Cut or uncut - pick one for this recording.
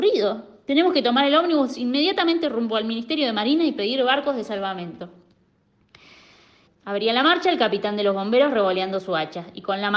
cut